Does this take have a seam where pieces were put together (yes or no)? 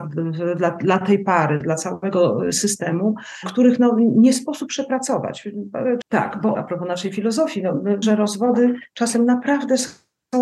yes